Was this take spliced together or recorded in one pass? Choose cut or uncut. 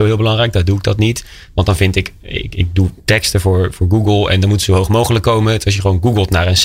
uncut